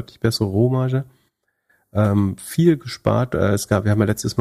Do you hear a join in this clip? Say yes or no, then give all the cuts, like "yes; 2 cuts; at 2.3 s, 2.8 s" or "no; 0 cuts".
no; 0 cuts